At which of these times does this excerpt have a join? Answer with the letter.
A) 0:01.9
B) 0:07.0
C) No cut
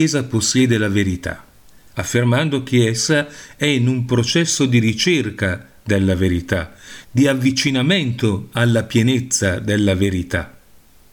B